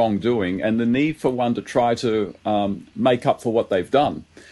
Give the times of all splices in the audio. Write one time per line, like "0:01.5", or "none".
none